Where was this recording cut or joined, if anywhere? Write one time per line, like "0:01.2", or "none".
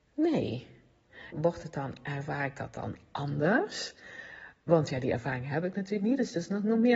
0:01.3